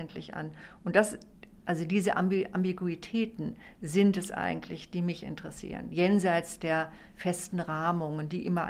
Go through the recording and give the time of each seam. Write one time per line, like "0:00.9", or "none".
none

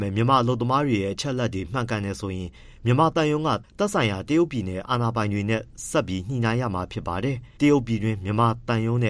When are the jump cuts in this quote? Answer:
0:07.6

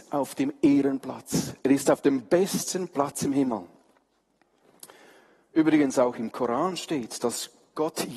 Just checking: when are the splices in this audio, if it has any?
none

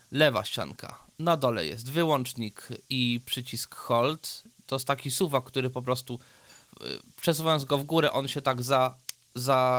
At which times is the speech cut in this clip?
none

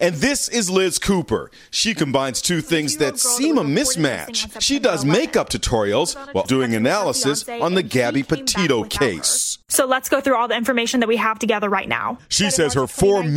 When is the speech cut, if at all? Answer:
0:06.4

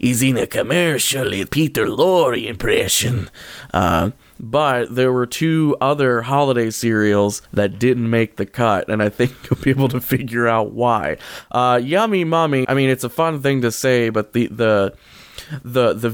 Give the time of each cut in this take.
0:07.5
0:12.6

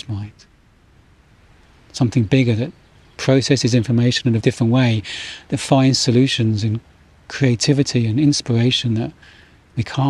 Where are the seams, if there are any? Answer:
0:04.4

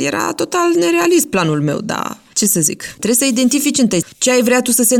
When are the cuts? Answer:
0:03.0
0:04.0

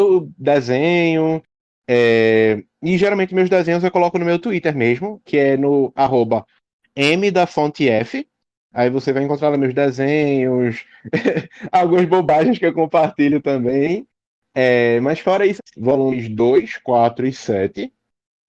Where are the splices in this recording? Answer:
0:15.6

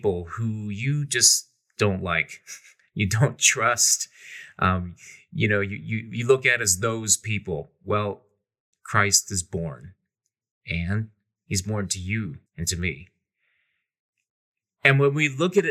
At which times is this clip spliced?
0:08.7
0:12.5

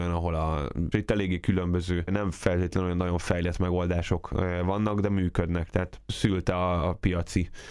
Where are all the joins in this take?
0:00.9

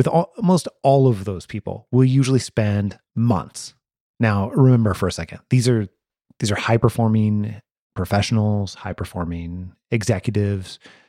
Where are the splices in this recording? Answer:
none

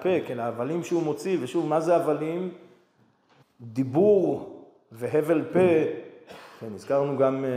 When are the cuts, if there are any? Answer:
0:03.4

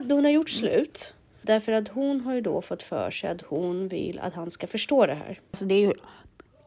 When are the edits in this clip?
0:01.4

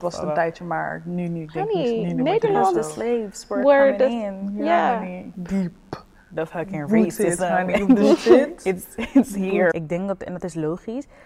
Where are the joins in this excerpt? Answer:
0:05.3
0:09.7

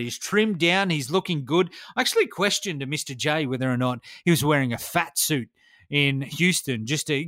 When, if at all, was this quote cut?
none

